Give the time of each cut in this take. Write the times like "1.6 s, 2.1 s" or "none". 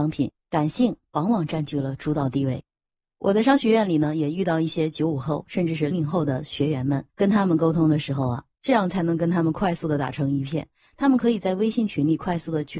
5.9 s, 7.1 s, 8.5 s